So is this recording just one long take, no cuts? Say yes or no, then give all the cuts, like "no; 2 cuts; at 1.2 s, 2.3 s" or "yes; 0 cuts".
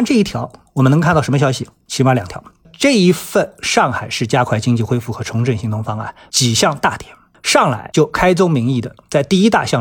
no; 2 cuts; at 2.6 s, 6.3 s